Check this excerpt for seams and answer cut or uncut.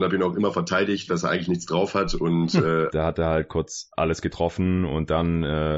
cut